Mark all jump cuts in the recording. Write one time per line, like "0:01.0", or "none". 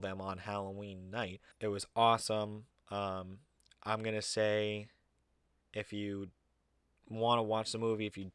0:01.5